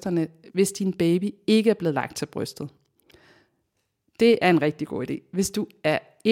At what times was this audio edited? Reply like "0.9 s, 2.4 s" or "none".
none